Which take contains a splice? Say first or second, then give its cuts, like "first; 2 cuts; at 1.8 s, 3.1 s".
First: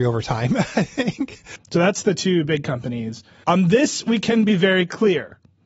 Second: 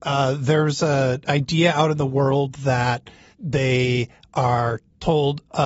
first; 2 cuts; at 1.6 s, 3.4 s